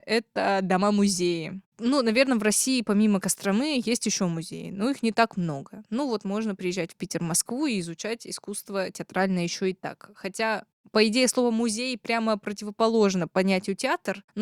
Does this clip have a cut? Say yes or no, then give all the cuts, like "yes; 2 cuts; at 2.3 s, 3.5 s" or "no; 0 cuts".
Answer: no; 0 cuts